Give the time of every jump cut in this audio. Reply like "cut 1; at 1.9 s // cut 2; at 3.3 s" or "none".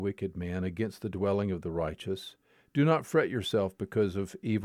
cut 1; at 2.7 s